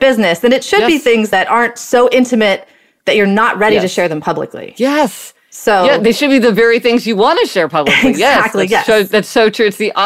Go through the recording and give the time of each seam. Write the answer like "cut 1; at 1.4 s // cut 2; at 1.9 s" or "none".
none